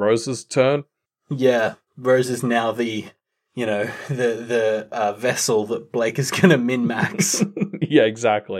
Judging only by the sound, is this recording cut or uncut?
uncut